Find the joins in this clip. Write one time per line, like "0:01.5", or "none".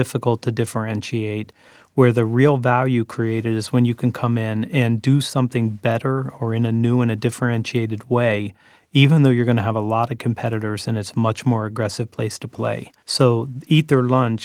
0:13.0